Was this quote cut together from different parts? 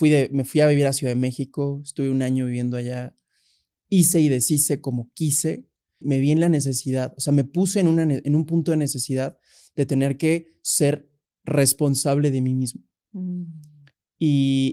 yes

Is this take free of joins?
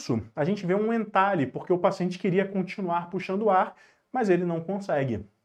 yes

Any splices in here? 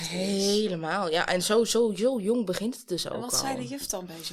no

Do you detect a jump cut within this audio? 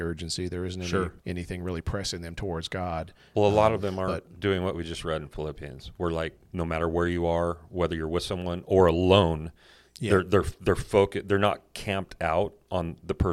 yes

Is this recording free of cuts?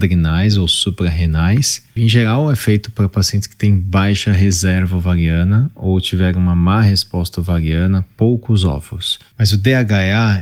no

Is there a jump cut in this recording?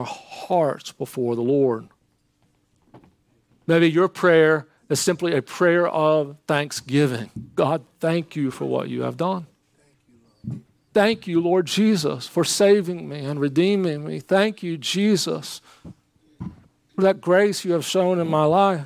no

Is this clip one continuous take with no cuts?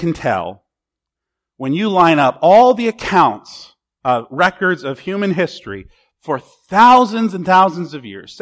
yes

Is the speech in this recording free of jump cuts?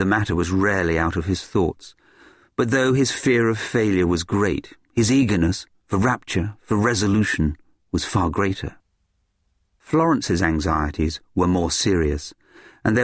yes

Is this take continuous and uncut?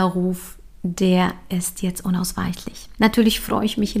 no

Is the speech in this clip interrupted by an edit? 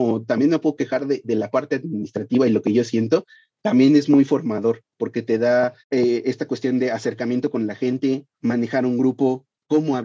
yes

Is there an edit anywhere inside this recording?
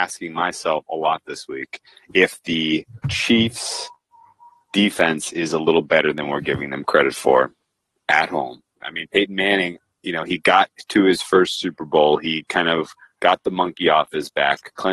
yes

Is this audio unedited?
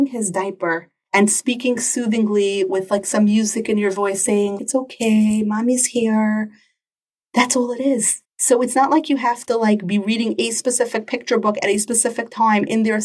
no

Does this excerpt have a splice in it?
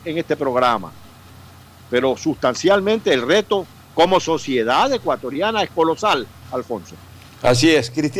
no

